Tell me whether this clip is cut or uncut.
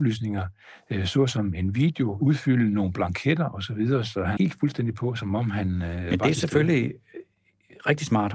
cut